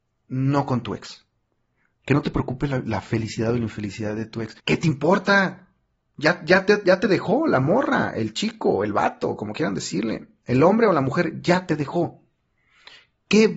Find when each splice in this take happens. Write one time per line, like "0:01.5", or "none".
0:04.6